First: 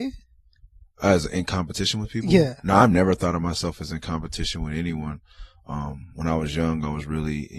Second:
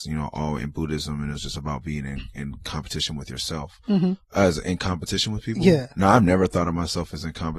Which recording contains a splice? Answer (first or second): second